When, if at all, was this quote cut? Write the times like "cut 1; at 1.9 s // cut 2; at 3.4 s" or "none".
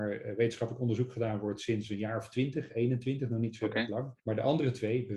cut 1; at 4.2 s